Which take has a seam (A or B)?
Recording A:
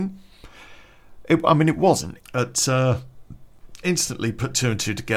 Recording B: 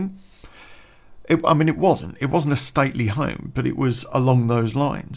A